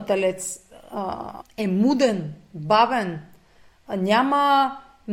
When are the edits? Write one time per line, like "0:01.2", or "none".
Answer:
0:01.4